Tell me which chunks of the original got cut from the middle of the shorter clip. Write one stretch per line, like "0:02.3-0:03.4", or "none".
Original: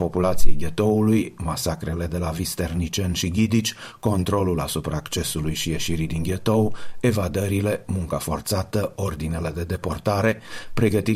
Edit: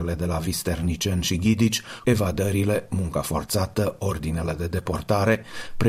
0:04.0-0:07.0